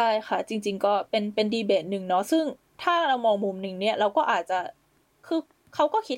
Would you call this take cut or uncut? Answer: uncut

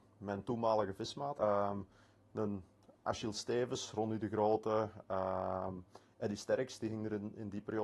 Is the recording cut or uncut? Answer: cut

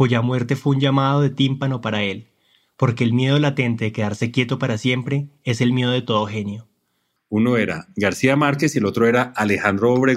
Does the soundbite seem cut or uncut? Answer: cut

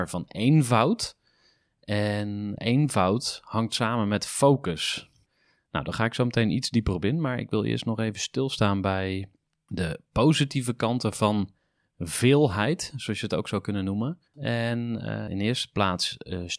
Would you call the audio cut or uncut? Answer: cut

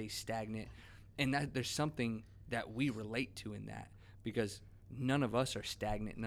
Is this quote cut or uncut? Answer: uncut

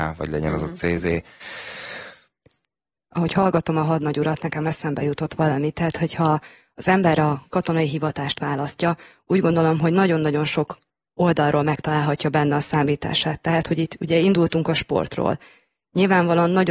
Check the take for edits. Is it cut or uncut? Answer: uncut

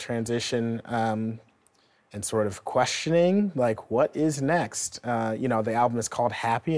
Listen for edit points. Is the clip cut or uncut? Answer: uncut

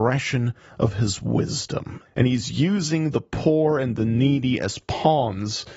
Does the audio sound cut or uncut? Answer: cut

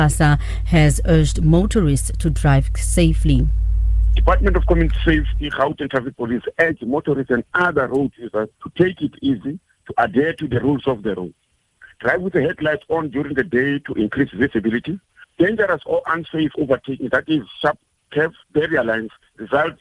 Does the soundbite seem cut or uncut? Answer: cut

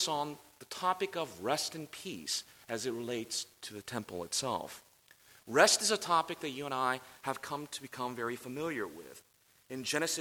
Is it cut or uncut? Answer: uncut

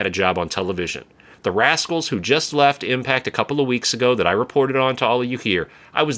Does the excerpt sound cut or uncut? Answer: uncut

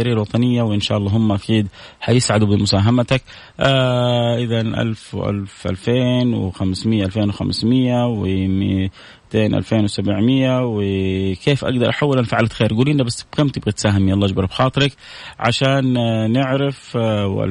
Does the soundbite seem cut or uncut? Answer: uncut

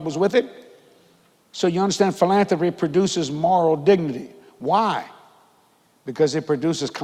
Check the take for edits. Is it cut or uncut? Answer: uncut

